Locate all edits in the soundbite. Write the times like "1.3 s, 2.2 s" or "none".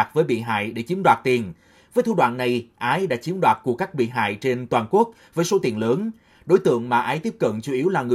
none

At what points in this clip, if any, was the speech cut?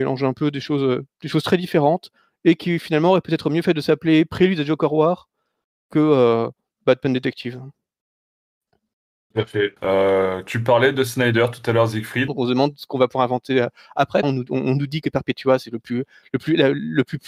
9.8 s, 12.3 s, 14.2 s

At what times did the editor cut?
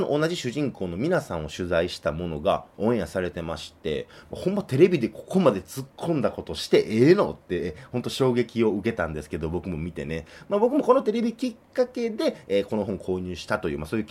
none

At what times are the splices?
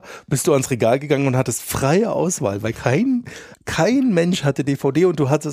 3.5 s

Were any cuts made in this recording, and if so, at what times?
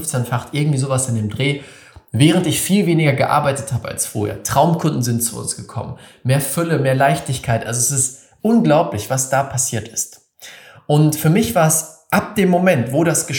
none

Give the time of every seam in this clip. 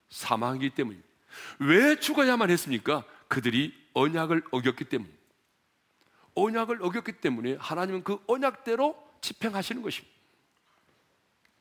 none

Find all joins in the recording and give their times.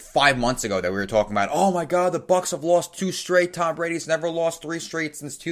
none

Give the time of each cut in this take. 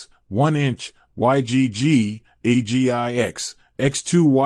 none

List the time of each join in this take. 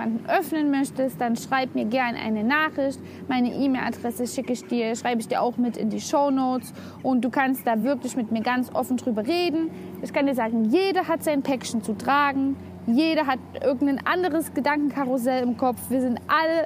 none

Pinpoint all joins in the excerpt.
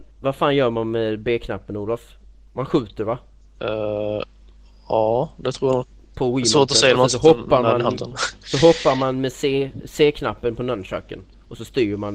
3.6 s

